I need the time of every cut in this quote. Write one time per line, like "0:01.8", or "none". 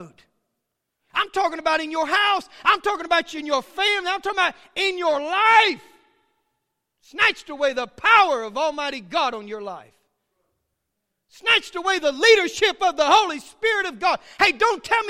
none